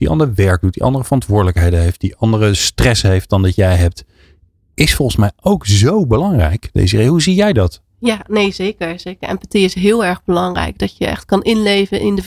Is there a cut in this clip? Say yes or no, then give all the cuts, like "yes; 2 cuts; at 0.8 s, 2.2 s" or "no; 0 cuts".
no; 0 cuts